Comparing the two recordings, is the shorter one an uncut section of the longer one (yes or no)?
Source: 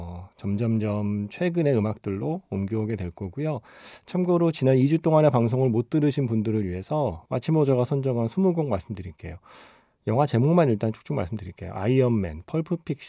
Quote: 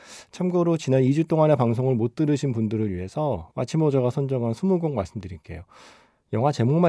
yes